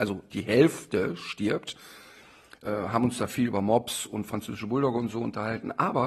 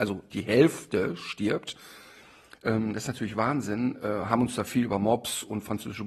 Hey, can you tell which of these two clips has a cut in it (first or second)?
first